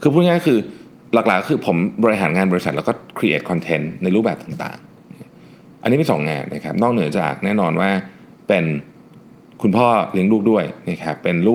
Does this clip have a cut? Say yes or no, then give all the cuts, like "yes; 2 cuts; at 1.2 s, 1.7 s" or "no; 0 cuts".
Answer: no; 0 cuts